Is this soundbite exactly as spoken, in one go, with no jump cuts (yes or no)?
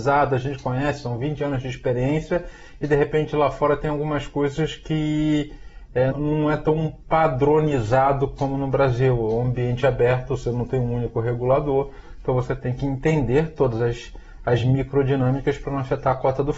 no